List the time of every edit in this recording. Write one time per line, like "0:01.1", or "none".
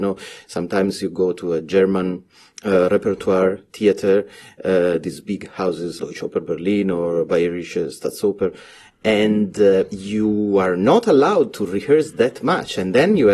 0:06.0